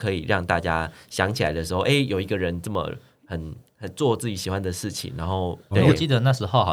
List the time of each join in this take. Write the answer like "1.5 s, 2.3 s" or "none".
5.7 s